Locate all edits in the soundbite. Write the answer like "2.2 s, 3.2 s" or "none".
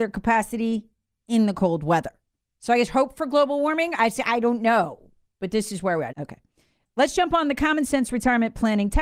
2.4 s, 6.1 s